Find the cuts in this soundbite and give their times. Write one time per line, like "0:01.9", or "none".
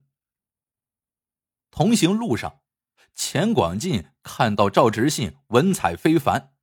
none